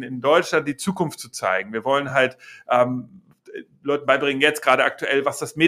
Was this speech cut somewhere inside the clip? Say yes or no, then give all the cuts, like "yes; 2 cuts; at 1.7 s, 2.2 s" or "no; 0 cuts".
no; 0 cuts